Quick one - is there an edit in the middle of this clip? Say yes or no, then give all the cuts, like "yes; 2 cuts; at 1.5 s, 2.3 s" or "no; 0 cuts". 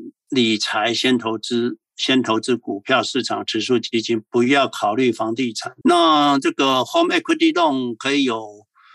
yes; 1 cut; at 5.8 s